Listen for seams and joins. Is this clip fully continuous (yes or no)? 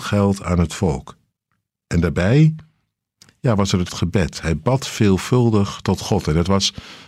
yes